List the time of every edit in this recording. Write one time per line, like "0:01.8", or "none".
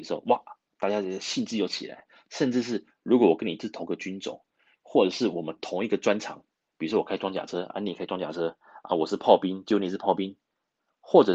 none

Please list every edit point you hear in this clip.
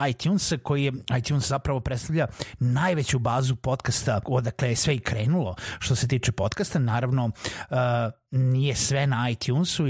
0:04.2

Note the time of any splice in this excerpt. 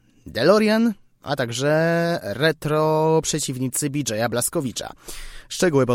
0:01.2

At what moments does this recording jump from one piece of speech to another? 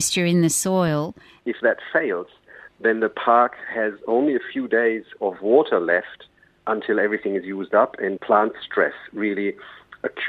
0:01.4
0:08.2

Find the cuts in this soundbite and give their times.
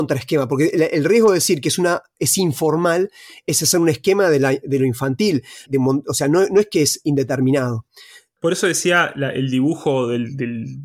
0:05.7

